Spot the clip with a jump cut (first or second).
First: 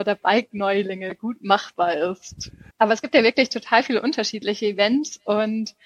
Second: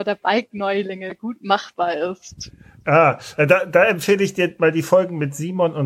first